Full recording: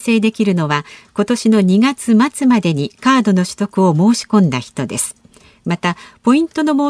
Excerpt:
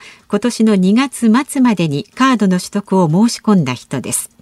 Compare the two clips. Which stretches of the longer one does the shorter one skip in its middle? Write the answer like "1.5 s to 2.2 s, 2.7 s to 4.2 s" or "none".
none